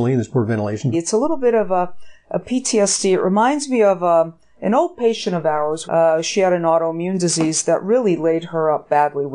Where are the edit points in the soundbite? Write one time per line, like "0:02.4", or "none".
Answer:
0:00.9
0:05.8